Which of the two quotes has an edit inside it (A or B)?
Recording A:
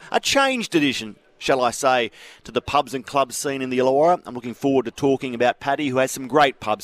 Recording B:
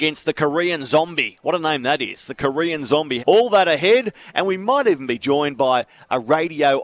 B